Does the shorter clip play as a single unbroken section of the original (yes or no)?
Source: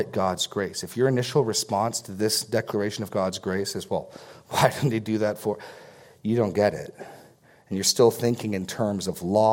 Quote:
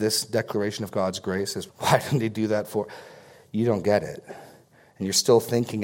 no